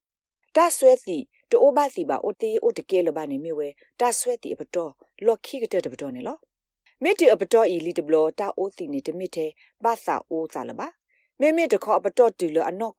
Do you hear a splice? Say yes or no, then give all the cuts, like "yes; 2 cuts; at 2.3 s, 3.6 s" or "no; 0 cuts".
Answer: yes; 1 cut; at 2.3 s